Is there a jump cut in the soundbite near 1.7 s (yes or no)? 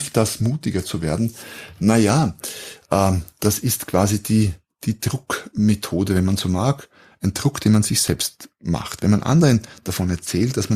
no